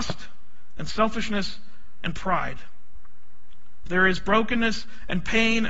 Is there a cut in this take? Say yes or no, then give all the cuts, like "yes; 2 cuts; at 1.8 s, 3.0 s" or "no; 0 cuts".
yes; 1 cut; at 3.9 s